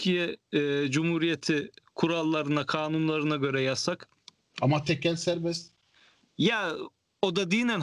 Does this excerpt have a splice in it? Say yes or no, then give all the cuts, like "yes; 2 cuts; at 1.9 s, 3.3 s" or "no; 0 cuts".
no; 0 cuts